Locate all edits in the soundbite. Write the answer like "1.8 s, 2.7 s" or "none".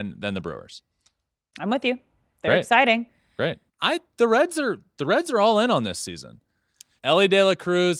3.7 s, 7.0 s